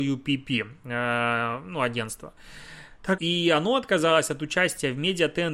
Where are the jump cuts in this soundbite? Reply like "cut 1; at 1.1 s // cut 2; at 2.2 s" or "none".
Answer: cut 1; at 3.2 s